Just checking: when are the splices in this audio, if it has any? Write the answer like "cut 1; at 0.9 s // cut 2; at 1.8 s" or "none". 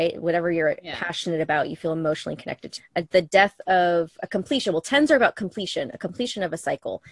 cut 1; at 2.8 s